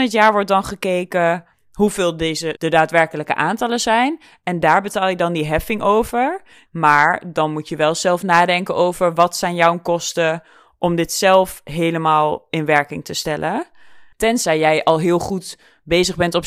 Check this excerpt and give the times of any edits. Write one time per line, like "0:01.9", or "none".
0:02.6
0:06.7
0:14.1

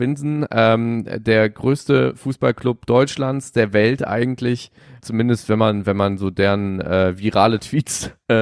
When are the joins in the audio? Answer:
0:05.0

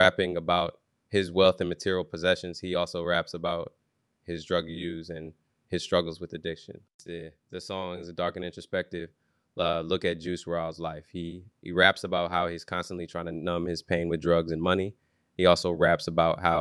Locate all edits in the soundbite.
none

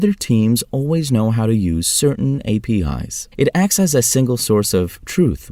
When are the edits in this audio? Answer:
0:03.3

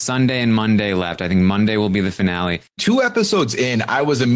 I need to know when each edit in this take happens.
0:02.8

